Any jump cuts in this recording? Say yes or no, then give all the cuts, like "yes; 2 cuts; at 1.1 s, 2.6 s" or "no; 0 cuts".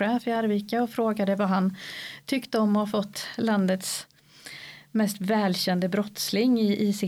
no; 0 cuts